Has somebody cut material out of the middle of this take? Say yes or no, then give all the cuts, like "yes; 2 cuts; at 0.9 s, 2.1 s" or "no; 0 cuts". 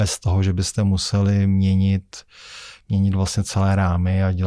no; 0 cuts